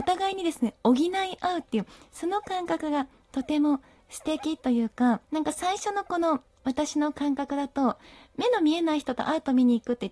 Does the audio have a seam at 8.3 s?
no; 1 cut; at 5.2 s

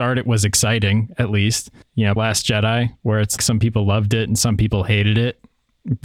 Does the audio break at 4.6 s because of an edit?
no; 2 cuts; at 2.2 s, 3.4 s

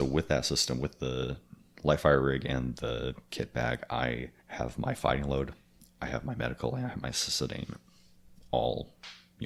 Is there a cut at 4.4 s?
yes; 1 cut; at 4.4 s

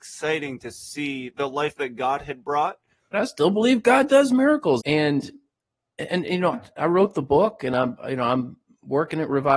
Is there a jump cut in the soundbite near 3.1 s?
yes; 3 cuts; at 3.1 s, 4.8 s, 6.5 s

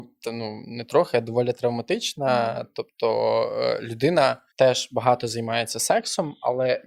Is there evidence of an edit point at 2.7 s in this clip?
no; 1 cut; at 4.5 s

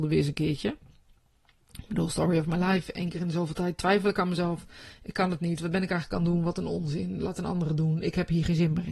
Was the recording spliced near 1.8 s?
no; 0 cuts

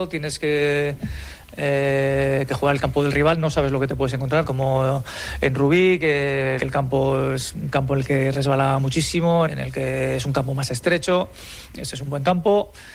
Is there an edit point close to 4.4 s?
yes; 3 cuts; at 4.4 s, 6.6 s, 9.5 s

